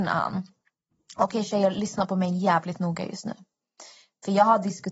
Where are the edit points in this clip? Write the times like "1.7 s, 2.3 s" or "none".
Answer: none